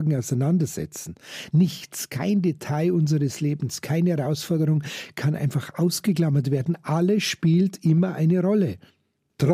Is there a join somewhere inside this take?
no; 0 cuts

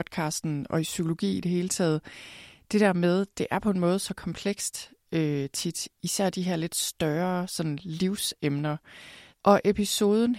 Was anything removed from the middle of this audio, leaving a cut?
yes; 1 cut; at 9.3 s

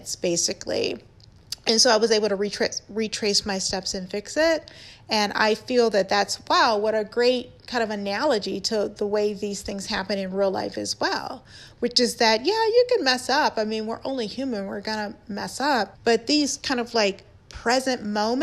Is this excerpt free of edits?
no; 1 cut; at 16.0 s

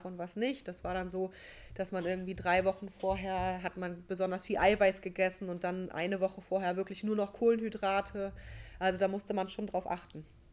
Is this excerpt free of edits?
yes; 0 cuts

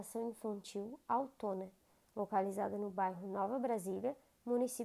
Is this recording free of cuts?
yes; 0 cuts

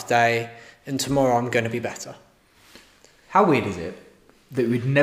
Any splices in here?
no; 0 cuts

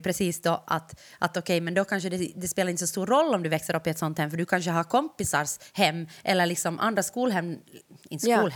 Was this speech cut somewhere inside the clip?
no; 0 cuts

